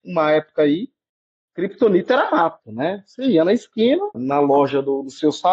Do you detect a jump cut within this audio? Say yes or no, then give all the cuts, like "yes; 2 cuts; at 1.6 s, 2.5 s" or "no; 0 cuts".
yes; 1 cut; at 4.1 s